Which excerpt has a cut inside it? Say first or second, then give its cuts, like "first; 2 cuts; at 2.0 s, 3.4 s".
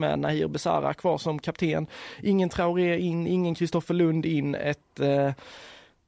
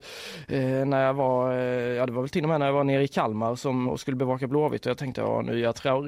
second; 1 cut; at 3.8 s